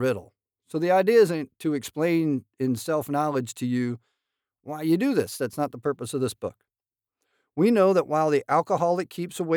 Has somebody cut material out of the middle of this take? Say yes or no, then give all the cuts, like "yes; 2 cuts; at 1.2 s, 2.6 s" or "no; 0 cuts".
no; 0 cuts